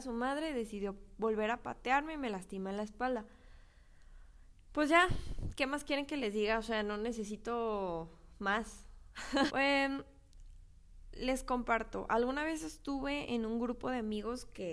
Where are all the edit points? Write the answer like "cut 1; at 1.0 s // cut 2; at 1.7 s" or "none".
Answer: cut 1; at 9.5 s